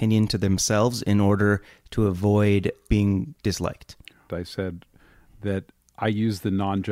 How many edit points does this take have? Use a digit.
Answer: 2